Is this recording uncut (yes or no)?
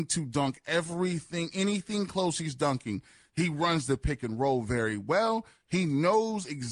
yes